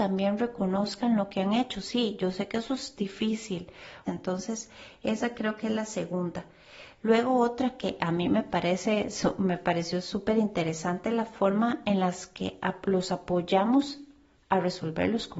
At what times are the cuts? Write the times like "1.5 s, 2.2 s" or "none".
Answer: 4.0 s